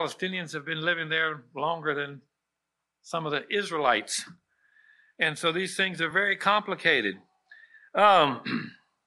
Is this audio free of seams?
yes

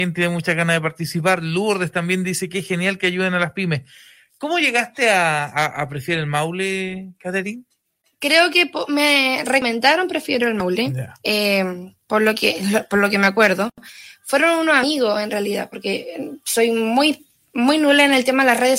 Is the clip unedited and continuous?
yes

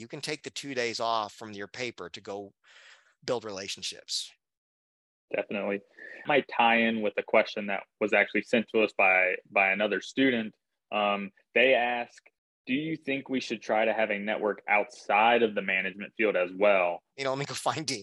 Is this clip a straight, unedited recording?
no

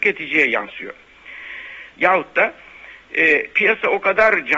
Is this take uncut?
no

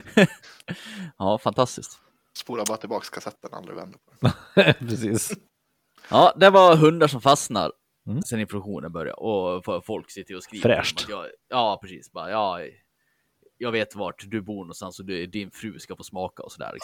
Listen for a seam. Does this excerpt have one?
yes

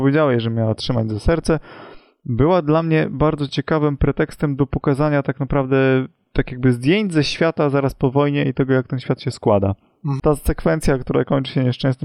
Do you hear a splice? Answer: yes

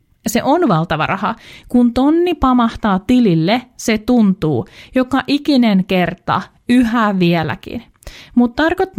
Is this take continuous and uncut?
yes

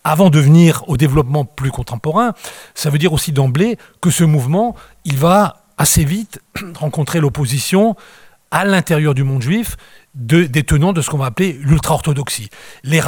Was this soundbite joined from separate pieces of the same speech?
no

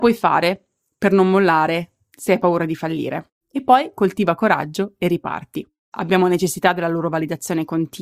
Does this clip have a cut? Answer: yes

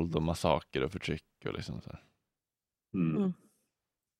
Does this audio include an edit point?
no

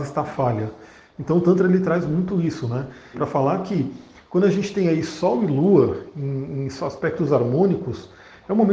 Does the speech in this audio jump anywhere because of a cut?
yes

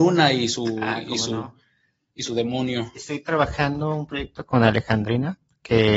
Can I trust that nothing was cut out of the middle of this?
yes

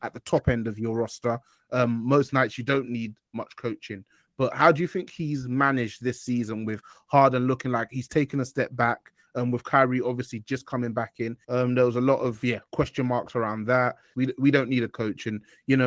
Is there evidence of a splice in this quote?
yes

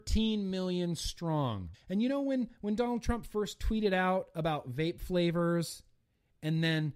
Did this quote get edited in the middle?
yes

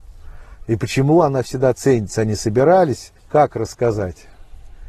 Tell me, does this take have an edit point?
yes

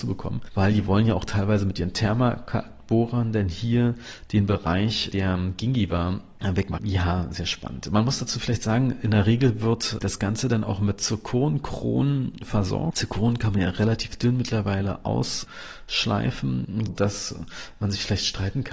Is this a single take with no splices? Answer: no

